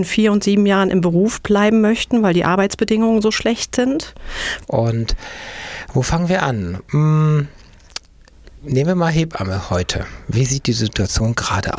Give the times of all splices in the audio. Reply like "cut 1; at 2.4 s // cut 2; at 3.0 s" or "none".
cut 1; at 4.6 s

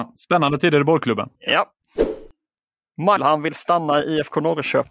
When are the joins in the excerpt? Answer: cut 1; at 1.4 s // cut 2; at 3.2 s

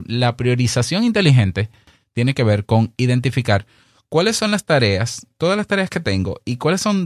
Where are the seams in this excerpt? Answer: none

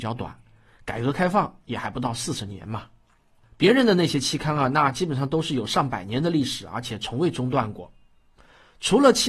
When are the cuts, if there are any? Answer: none

